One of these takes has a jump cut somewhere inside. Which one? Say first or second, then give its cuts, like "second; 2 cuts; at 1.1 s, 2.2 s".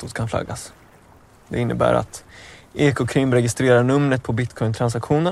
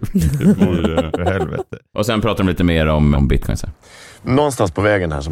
second; 1 cut; at 3.1 s